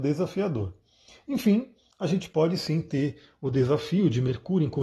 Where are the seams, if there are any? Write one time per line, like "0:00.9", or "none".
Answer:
none